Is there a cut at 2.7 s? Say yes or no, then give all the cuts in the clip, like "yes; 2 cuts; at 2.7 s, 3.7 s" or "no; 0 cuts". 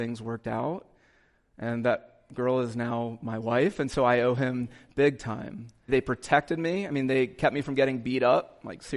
no; 1 cut; at 5.9 s